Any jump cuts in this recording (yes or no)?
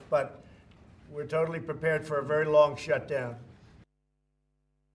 no